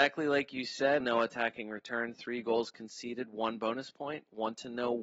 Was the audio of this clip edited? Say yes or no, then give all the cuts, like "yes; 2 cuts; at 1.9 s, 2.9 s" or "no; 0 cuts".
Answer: yes; 1 cut; at 1.0 s